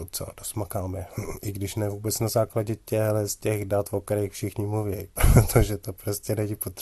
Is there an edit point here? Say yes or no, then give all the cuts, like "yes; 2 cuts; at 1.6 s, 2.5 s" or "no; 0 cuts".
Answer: no; 0 cuts